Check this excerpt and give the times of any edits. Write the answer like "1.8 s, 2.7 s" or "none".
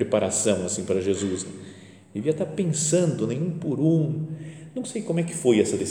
none